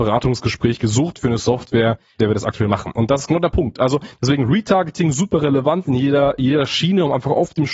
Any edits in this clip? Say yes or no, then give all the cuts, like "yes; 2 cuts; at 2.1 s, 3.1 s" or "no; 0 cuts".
no; 0 cuts